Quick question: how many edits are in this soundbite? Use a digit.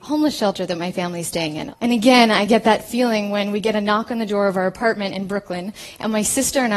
1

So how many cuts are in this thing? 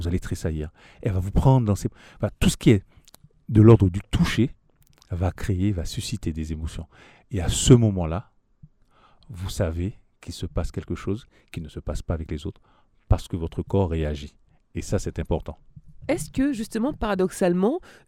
0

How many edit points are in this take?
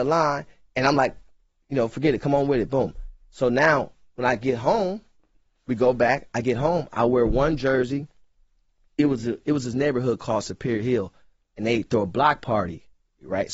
0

